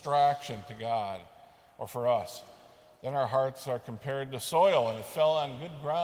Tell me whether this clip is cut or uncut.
uncut